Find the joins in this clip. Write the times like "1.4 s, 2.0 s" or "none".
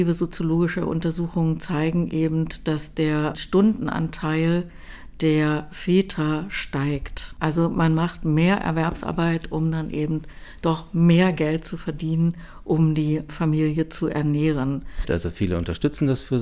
15.0 s